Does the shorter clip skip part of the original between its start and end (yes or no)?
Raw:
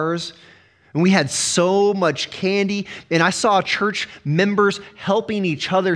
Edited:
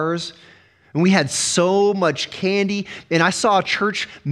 no